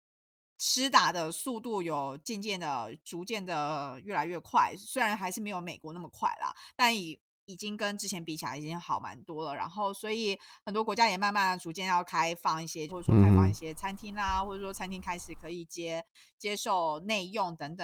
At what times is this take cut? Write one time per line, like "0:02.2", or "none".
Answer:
0:12.9